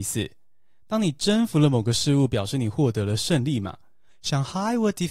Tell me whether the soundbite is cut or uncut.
cut